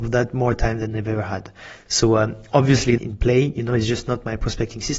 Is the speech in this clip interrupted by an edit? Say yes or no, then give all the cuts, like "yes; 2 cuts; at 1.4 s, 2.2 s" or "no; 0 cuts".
yes; 2 cuts; at 1.9 s, 3.0 s